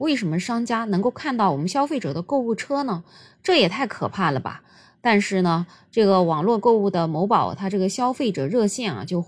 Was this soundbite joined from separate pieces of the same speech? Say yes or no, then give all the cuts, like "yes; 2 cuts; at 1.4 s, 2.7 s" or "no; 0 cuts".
no; 0 cuts